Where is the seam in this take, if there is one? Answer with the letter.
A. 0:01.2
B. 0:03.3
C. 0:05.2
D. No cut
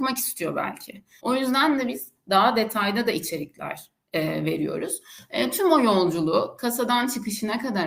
A